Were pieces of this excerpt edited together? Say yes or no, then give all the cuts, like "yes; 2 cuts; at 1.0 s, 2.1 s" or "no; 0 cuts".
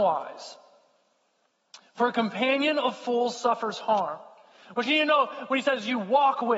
no; 0 cuts